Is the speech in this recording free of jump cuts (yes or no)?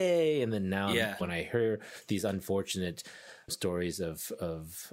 no